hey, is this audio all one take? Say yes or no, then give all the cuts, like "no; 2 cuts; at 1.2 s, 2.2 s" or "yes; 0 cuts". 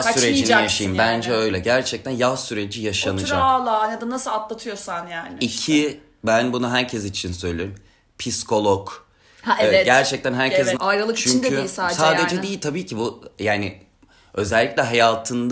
no; 1 cut; at 10.8 s